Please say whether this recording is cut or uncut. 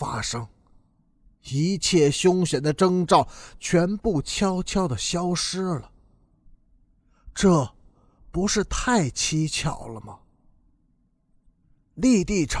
uncut